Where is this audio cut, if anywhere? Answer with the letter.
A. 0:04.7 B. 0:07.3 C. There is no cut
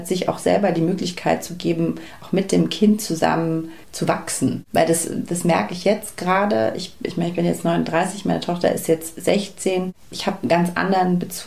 C